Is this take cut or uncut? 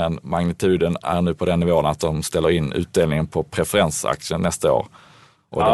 uncut